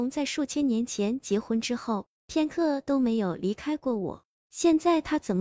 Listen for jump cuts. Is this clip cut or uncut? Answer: uncut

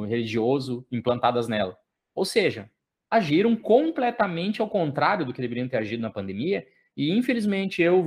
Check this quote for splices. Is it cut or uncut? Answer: uncut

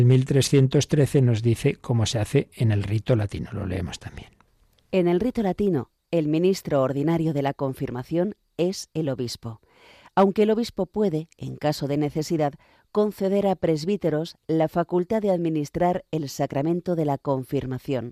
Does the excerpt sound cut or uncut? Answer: uncut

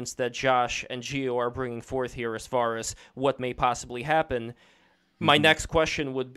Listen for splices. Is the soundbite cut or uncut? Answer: uncut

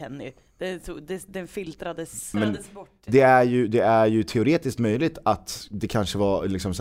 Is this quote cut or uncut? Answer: cut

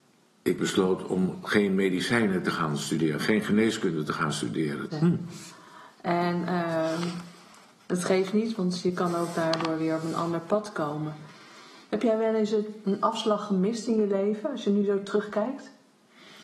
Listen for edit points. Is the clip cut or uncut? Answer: cut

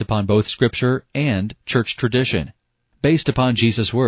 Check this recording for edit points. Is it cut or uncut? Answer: uncut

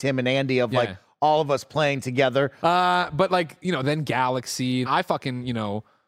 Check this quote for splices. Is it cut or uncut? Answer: cut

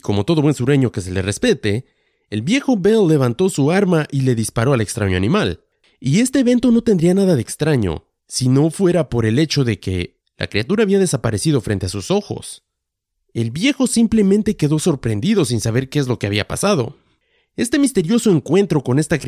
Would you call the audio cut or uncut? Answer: cut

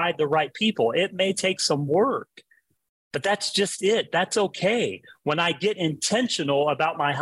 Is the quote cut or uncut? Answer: uncut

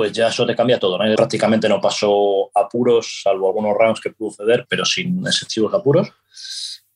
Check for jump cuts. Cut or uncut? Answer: cut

